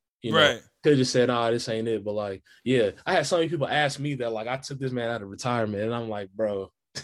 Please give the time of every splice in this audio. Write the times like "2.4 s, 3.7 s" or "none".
none